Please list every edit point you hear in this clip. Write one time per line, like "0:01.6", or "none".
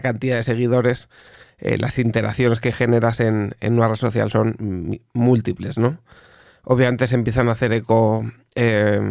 none